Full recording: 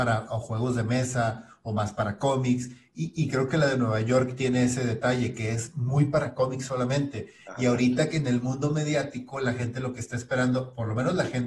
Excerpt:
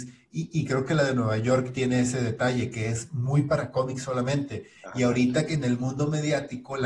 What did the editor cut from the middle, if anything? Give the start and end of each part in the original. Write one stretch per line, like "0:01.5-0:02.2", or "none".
none